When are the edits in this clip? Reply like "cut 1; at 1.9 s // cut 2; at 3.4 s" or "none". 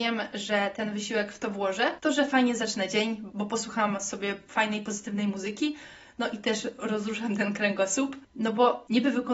cut 1; at 8.3 s